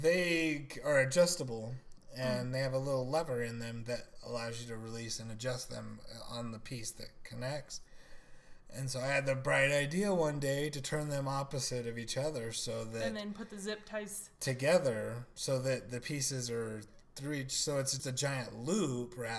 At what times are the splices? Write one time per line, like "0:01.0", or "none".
0:18.0